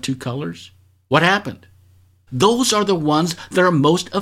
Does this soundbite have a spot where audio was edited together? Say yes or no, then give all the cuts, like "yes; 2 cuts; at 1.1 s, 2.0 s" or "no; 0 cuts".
yes; 1 cut; at 2.3 s